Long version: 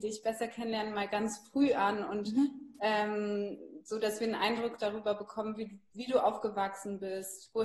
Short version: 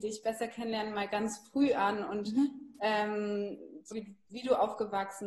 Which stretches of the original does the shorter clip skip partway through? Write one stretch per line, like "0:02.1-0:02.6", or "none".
0:03.9-0:05.5